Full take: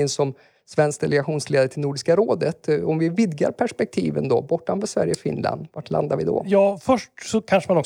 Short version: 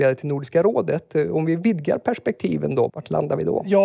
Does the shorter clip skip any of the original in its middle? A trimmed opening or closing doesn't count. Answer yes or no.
yes